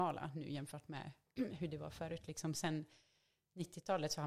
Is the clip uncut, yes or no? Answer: yes